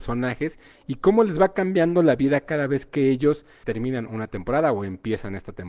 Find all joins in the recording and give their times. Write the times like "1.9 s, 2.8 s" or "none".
4.1 s